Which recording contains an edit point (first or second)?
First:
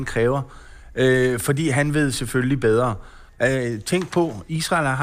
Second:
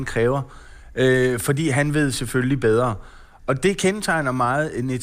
first